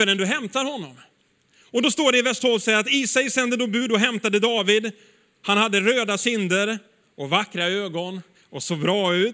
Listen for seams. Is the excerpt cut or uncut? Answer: uncut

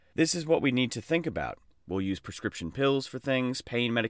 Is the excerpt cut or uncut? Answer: cut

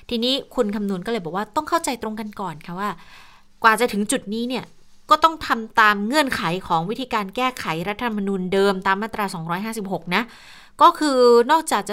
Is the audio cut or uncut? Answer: uncut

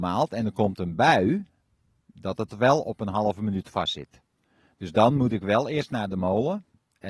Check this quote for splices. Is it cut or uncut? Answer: uncut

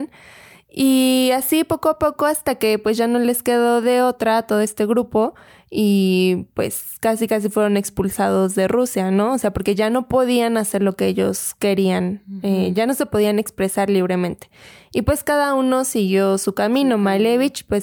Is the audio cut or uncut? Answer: uncut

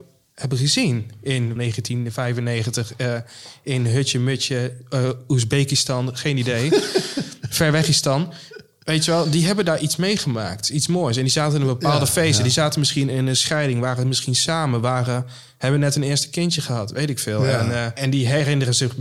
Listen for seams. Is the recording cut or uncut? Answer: cut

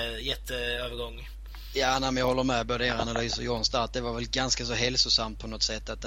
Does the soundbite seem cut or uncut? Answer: uncut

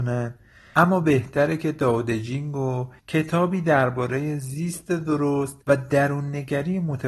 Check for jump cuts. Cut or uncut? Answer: cut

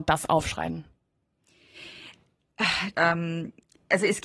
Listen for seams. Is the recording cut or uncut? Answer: cut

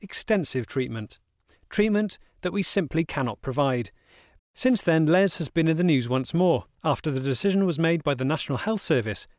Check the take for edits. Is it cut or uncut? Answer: cut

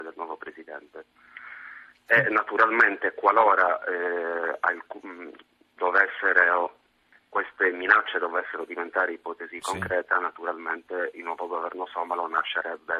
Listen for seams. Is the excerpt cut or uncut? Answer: uncut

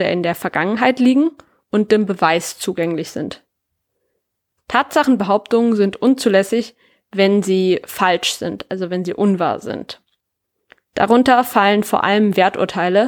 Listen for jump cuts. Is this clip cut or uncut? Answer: cut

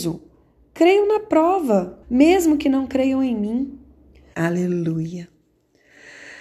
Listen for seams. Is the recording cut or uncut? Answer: cut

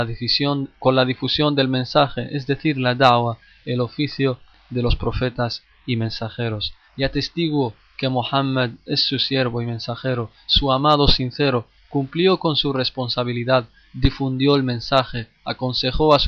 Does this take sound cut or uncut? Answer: uncut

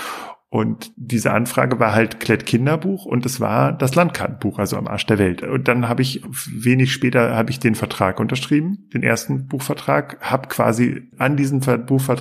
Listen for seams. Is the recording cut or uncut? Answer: cut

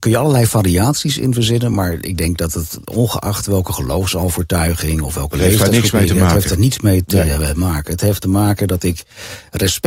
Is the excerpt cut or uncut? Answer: uncut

